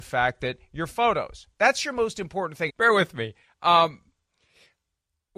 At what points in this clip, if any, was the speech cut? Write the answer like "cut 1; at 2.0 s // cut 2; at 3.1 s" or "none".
cut 1; at 2.7 s